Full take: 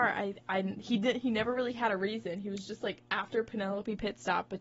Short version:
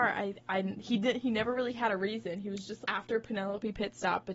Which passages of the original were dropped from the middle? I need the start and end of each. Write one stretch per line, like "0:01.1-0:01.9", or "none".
0:02.8-0:03.0